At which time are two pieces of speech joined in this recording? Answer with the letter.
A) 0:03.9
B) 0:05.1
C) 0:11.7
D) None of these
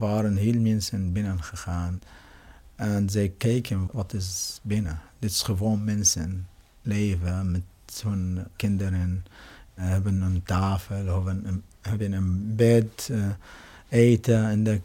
A